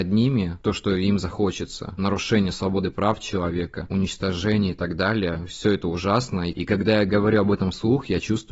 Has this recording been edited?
no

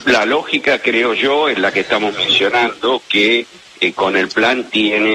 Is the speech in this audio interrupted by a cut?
no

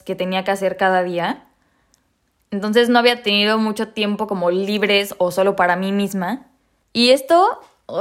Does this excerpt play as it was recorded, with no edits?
no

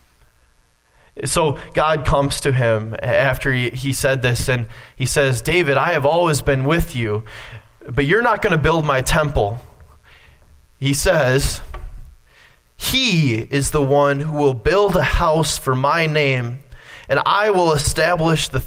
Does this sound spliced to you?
no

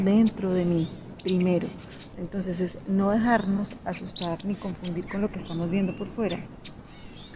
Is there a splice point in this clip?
yes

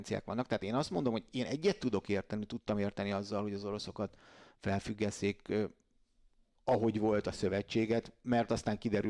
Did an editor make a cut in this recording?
no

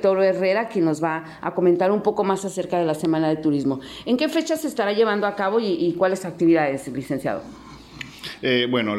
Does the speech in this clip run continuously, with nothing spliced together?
yes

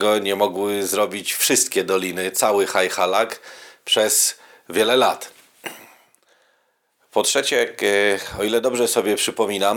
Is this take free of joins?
yes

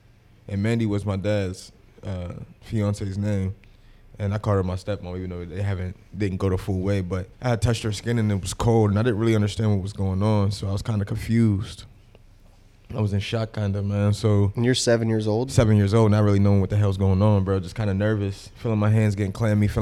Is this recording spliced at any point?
yes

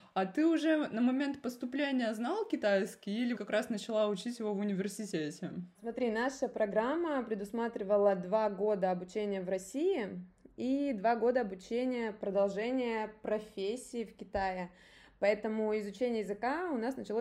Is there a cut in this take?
yes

